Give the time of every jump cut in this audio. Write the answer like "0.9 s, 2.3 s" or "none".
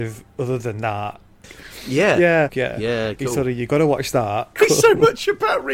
1.4 s, 2.5 s, 4.6 s